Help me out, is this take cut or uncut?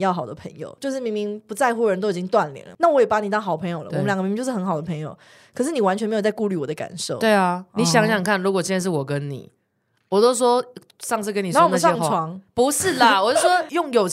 uncut